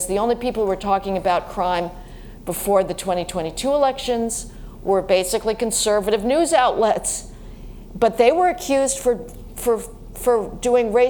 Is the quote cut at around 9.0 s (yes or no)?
no